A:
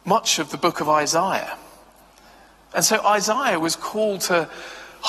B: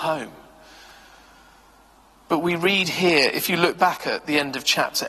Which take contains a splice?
A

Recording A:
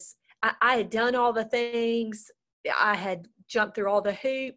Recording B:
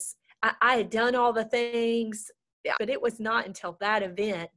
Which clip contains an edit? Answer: B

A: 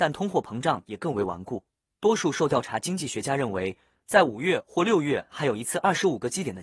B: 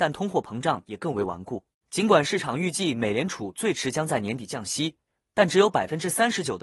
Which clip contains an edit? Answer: B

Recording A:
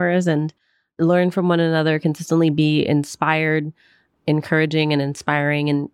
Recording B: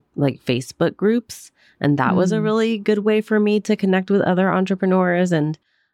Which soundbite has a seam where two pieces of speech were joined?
A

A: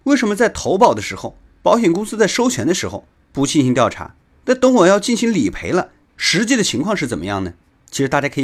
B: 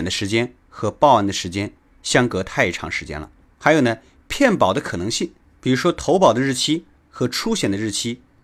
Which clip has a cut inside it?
A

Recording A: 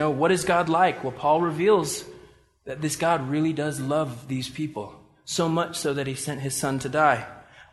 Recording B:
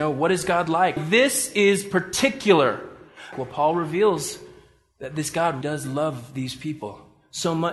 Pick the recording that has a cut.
B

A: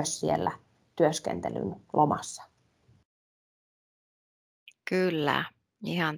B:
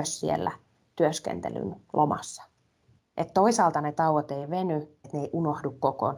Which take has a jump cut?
B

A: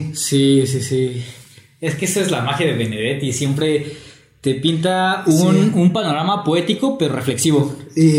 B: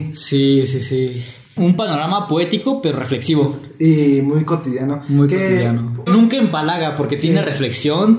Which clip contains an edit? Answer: B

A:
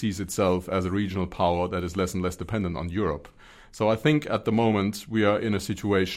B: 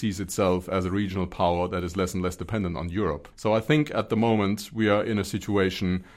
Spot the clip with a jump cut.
B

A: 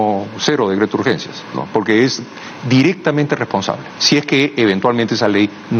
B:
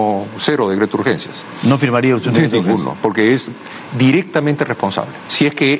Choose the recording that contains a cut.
A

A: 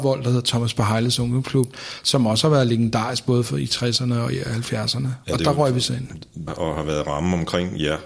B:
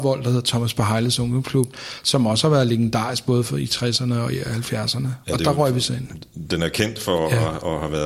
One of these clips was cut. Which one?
A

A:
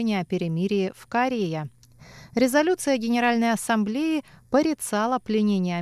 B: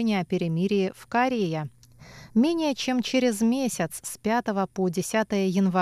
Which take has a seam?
B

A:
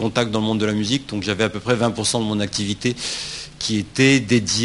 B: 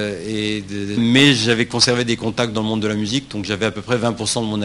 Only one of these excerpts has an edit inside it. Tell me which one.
B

